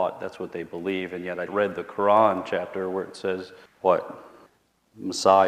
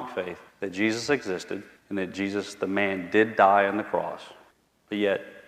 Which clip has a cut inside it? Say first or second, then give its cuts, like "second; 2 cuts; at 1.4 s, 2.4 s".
first; 1 cut; at 1.5 s